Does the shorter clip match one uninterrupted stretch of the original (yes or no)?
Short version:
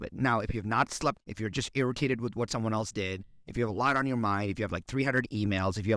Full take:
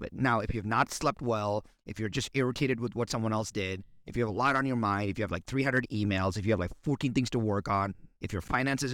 no